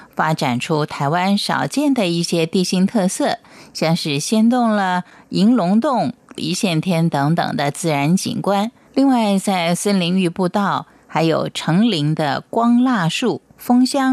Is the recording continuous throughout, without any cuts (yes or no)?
no